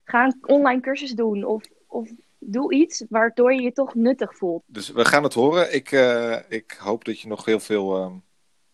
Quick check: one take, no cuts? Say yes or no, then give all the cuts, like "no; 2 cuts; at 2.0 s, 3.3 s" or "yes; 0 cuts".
no; 1 cut; at 4.6 s